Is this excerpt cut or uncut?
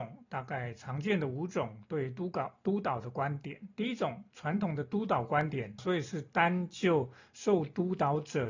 cut